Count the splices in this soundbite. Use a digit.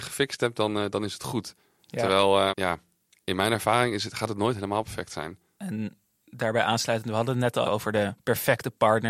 3